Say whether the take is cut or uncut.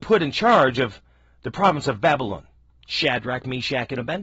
uncut